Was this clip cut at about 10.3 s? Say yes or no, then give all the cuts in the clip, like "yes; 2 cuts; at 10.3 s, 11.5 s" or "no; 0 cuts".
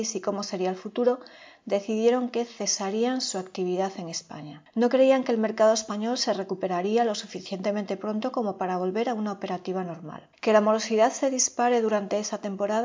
yes; 1 cut; at 10.3 s